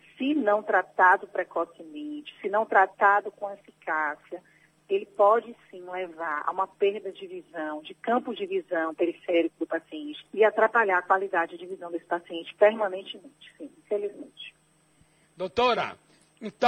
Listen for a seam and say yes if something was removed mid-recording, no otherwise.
yes